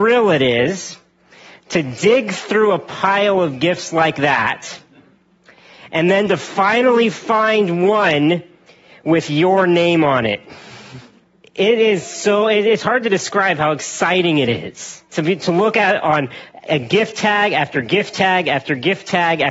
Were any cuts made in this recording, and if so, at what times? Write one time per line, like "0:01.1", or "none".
0:11.4
0:15.0